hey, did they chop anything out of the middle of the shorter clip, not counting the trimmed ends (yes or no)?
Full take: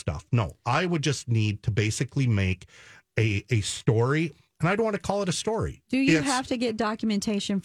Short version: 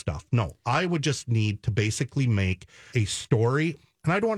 yes